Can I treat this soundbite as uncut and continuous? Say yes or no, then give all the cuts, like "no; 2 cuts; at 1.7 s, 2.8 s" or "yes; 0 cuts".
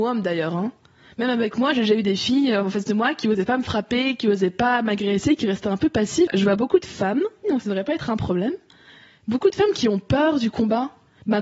no; 2 cuts; at 6.3 s, 7.4 s